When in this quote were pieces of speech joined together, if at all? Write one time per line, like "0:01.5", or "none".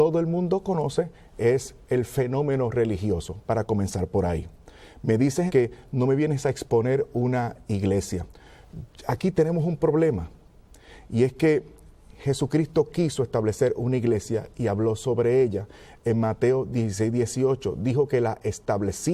0:05.5